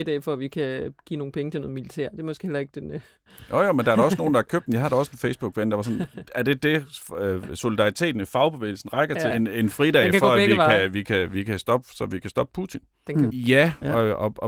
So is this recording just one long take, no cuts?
no; 2 cuts; at 9.3 s, 13.3 s

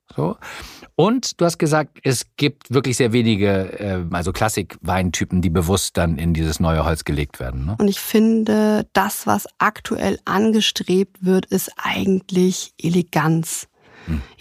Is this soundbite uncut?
no; 2 cuts; at 4.1 s, 7.8 s

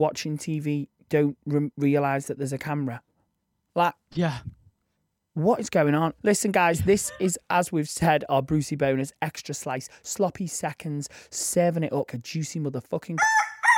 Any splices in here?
yes; 2 cuts; at 6.2 s, 12.1 s

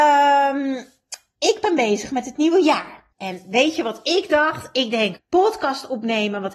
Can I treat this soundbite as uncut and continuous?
no; 2 cuts; at 3.1 s, 5.2 s

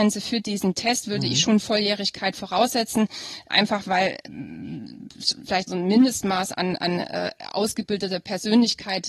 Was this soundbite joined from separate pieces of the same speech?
no; 0 cuts

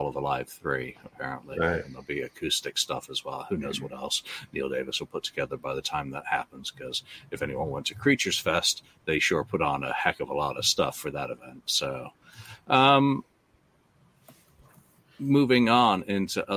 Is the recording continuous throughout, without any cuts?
yes; 0 cuts

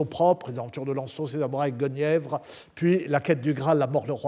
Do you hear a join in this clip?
no; 0 cuts

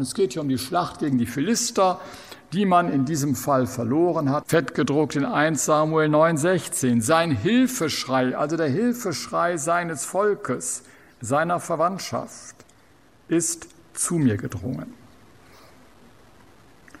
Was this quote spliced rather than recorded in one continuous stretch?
yes; 1 cut; at 4.4 s

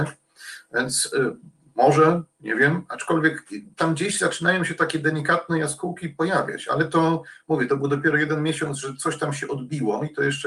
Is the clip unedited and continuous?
yes; 0 cuts

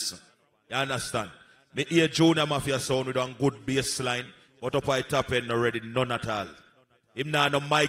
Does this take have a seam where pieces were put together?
no; 0 cuts

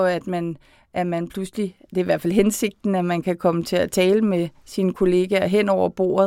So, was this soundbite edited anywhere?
no; 0 cuts

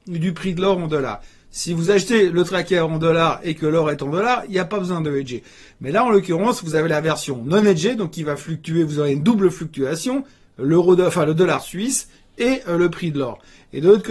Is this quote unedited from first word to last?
yes; 0 cuts

